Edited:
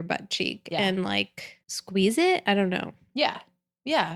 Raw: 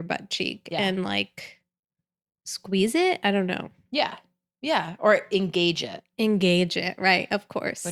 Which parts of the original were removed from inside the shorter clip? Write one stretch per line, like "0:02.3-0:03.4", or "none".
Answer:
0:01.6-0:02.4